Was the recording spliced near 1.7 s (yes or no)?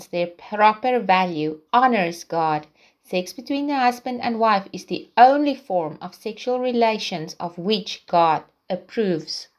yes